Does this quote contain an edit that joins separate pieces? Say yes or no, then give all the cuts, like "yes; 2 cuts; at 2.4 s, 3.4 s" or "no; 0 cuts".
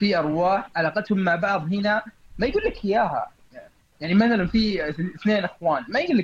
no; 0 cuts